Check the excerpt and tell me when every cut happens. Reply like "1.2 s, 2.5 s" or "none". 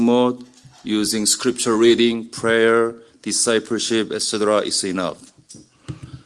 none